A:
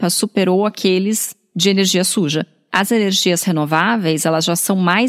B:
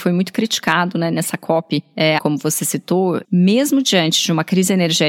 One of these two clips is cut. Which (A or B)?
B